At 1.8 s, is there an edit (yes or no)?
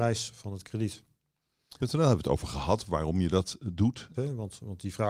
yes